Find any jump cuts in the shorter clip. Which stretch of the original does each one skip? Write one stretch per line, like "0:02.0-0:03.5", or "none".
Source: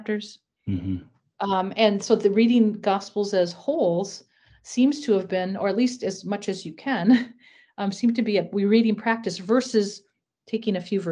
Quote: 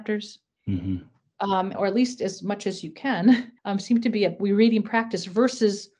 0:01.7-0:05.6
0:07.4-0:07.7